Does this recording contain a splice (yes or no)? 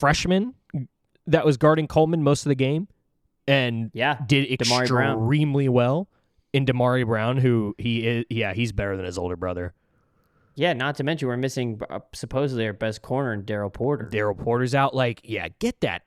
no